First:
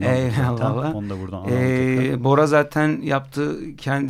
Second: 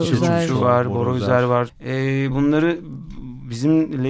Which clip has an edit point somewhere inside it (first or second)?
second